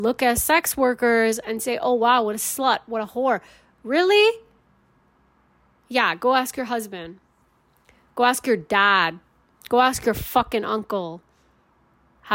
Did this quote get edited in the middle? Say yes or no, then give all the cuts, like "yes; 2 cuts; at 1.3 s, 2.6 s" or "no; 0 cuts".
no; 0 cuts